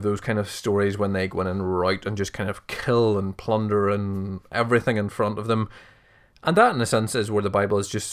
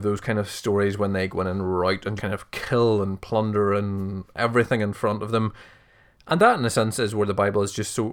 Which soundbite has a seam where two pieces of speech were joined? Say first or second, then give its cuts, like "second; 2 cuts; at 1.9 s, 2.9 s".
second; 1 cut; at 2.2 s